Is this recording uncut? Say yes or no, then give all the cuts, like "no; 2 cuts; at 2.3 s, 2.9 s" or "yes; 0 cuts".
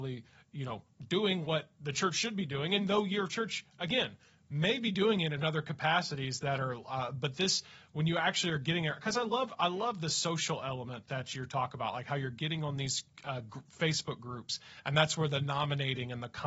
yes; 0 cuts